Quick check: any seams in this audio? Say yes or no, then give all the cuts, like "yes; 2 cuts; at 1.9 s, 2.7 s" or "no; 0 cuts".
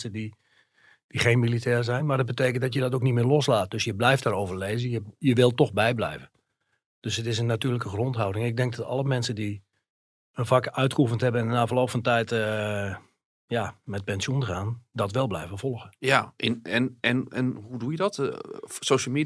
no; 0 cuts